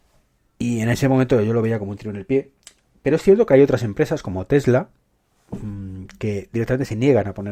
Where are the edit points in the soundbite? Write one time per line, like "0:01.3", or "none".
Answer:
none